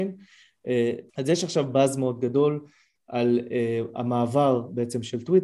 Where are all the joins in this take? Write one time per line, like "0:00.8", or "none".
0:01.1